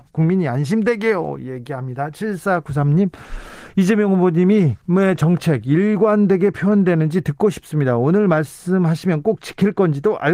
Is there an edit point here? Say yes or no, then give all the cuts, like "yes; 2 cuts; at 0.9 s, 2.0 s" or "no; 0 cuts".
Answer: yes; 1 cut; at 4.8 s